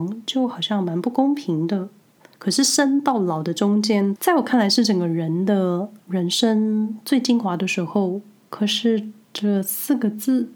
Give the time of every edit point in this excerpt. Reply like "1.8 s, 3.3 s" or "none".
2.3 s, 4.2 s